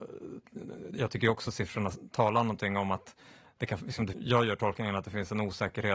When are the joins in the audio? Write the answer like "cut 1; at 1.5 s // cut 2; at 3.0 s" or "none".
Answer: cut 1; at 4.1 s